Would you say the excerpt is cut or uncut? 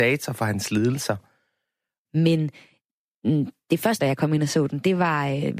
cut